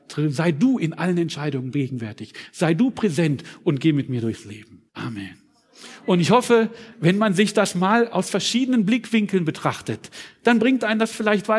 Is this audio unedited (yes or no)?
no